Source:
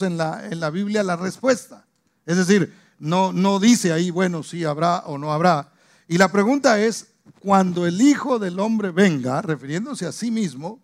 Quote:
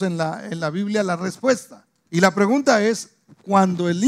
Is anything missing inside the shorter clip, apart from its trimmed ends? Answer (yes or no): yes